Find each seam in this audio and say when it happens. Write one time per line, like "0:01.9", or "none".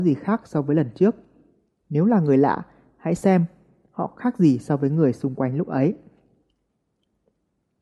none